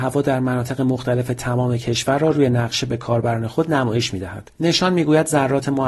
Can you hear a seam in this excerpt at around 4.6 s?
yes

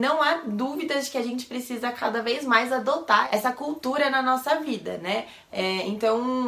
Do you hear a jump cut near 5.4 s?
yes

